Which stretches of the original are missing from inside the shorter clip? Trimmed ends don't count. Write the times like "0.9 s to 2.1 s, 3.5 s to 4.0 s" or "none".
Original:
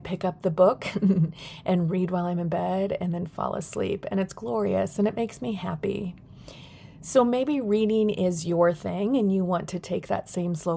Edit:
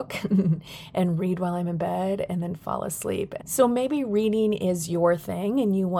4.1 s to 6.9 s